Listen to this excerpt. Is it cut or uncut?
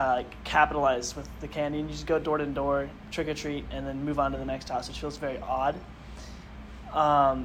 cut